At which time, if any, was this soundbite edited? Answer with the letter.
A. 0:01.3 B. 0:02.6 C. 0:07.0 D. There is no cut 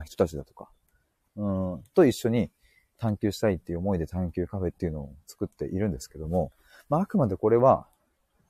A